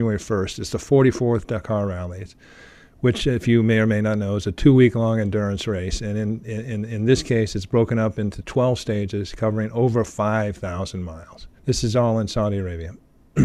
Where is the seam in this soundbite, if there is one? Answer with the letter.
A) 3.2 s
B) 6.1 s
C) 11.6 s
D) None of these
C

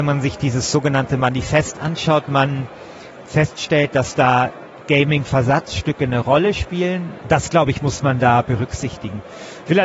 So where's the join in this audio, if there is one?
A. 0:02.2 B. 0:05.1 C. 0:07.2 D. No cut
C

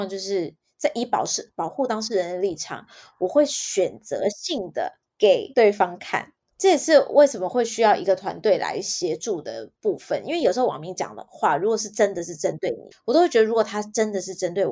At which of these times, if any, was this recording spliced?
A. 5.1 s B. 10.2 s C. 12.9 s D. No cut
C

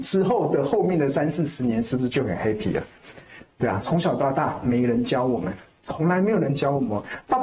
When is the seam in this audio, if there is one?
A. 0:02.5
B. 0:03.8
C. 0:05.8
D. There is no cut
B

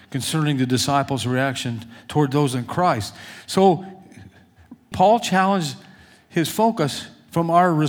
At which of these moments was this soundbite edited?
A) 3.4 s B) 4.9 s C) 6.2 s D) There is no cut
B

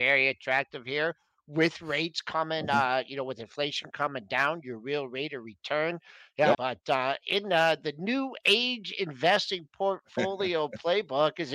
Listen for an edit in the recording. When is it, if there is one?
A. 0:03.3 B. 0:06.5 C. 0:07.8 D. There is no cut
B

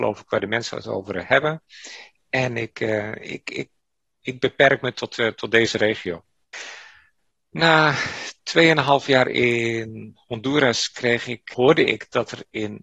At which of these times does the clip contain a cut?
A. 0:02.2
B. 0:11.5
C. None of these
B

